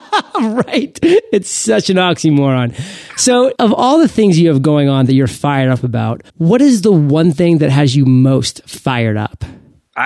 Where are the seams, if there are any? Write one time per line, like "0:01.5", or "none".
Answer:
0:03.6
0:06.3